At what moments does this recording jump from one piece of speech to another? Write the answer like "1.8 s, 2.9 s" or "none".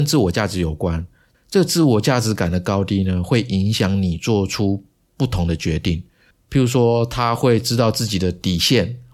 6.3 s